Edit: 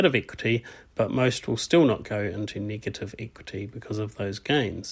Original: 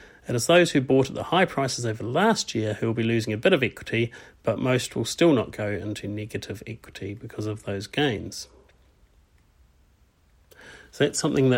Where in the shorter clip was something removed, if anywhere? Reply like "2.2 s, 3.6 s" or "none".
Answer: none

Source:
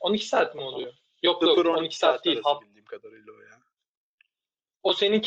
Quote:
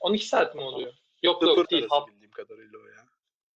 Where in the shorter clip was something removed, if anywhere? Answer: 1.6 s

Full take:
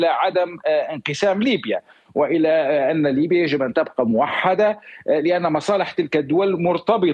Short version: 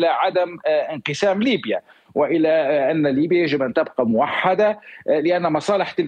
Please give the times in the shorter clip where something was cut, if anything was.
none

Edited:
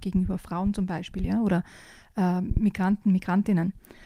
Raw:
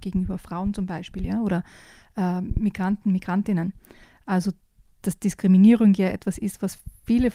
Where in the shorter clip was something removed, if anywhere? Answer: none

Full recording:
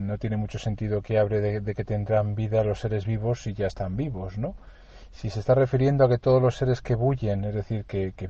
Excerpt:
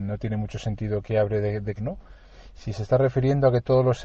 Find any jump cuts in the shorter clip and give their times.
1.8 s

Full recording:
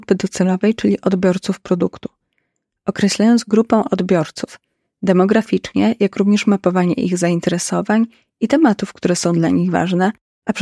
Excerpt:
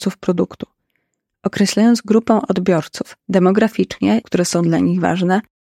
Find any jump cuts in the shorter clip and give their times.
3.2 s, 4.2 s

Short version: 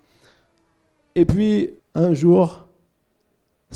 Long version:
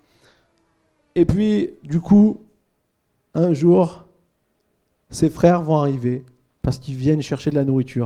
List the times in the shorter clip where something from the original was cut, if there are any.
1.8 s

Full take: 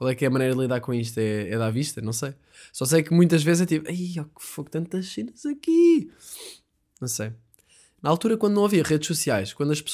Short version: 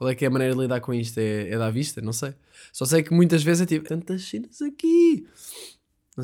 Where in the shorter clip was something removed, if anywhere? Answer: 3.9 s

